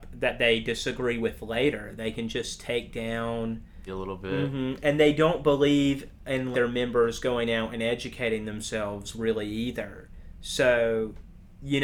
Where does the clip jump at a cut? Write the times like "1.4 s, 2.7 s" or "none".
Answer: 3.9 s, 6.5 s